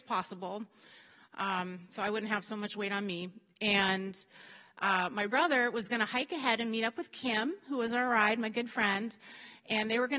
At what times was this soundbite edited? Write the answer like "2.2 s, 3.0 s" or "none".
none